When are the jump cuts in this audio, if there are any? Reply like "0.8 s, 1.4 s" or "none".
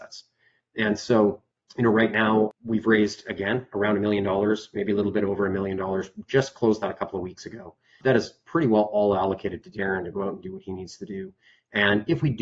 none